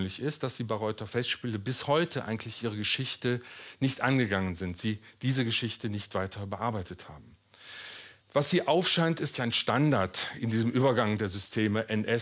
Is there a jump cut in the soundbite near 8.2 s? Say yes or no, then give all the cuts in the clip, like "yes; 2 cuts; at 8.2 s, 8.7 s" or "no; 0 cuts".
yes; 2 cuts; at 8.2 s, 9.3 s